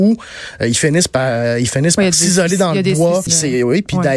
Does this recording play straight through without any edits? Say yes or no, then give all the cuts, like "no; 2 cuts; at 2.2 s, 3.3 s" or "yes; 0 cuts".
no; 1 cut; at 3.3 s